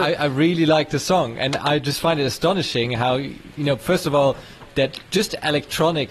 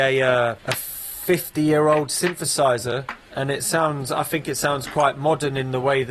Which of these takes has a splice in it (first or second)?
second